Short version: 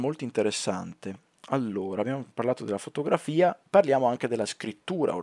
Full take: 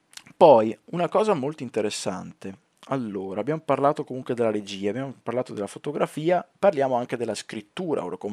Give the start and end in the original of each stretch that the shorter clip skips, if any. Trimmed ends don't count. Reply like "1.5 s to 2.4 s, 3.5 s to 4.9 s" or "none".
3.4 s to 4.9 s

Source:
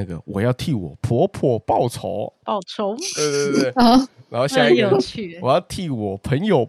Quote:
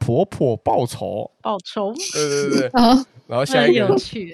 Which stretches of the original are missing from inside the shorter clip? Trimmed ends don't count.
none

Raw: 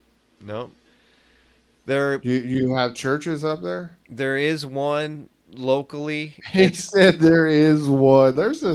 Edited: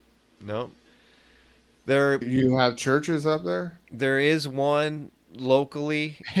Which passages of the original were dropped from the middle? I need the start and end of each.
2.2 s to 2.4 s

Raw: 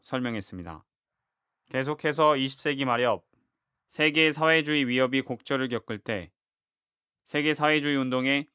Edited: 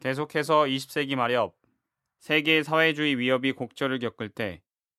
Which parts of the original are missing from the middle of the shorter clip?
none

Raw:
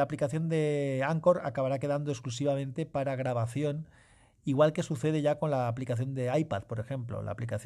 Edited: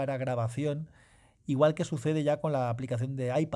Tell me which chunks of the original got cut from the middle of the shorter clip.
none

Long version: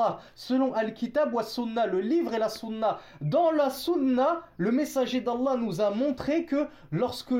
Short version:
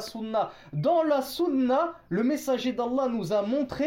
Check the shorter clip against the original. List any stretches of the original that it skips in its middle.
none

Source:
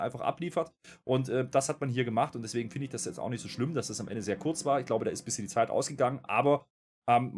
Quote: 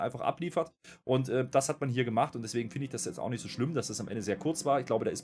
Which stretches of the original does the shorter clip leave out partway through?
none

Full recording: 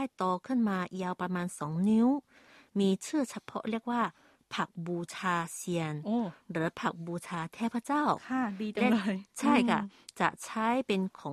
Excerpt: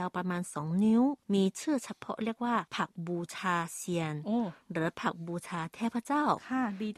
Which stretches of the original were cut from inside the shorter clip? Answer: 2.3 s to 2.7 s, 4.1 s to 4.5 s

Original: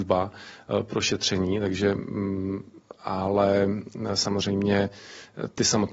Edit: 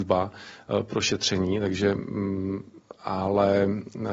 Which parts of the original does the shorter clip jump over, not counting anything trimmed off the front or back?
none

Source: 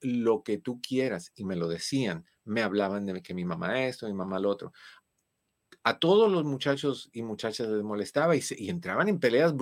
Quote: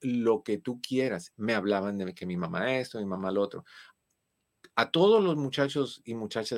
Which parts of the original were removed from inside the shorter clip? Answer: 1.3 s to 2.4 s

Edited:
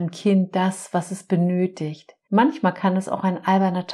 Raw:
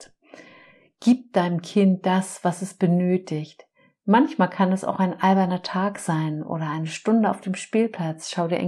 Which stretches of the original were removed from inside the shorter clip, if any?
3.7 s to 4.0 s

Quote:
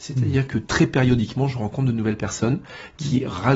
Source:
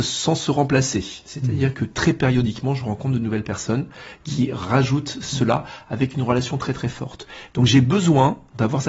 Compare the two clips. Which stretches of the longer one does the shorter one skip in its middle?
none

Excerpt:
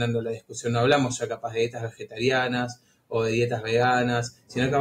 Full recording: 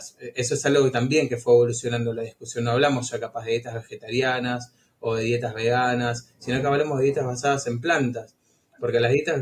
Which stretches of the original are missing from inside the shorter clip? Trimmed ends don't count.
none

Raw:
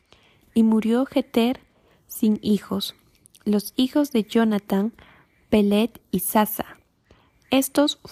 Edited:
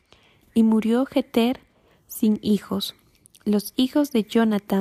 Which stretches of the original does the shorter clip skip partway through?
none

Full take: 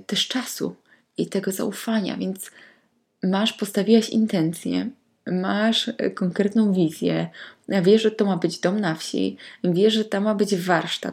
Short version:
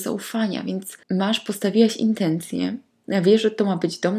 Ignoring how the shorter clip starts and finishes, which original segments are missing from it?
2.6 s to 3.2 s, 5.2 s to 7.6 s

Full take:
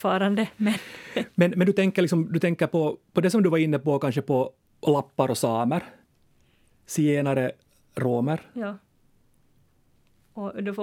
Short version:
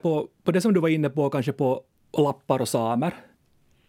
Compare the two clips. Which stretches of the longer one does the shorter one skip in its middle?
none

